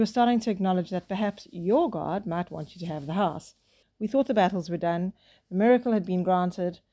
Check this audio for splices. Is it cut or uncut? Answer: cut